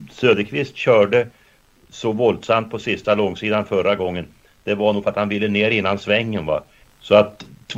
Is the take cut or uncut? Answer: cut